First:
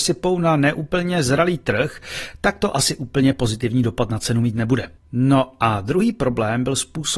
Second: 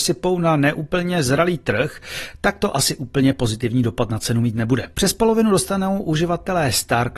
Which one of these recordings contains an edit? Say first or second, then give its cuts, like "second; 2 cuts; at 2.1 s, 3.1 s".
second; 1 cut; at 4.9 s